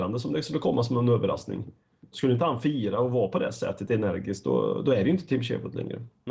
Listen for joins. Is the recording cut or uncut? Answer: cut